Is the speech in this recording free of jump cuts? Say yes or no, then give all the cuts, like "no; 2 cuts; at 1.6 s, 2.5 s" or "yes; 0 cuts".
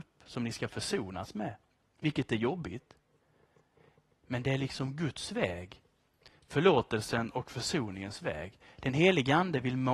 yes; 0 cuts